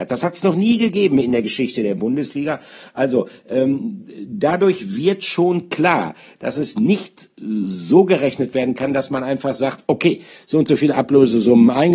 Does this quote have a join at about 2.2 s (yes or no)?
no